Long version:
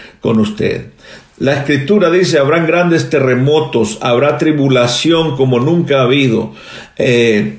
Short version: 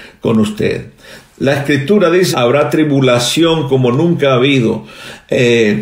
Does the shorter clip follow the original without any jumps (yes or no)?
no